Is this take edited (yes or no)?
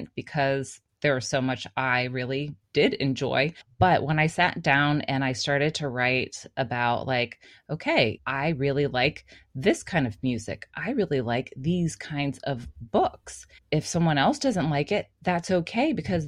no